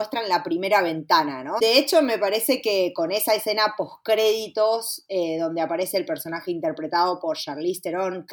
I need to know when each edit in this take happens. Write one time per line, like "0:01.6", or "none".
0:01.6